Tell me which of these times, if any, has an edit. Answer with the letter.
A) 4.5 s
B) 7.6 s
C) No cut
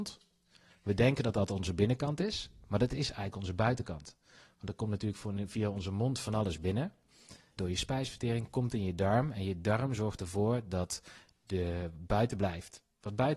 B